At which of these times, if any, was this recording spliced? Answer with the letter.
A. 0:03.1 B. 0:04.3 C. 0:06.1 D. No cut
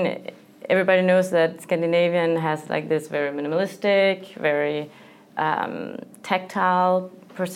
D